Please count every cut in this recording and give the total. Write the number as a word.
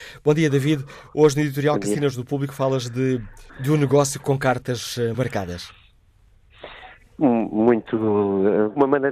two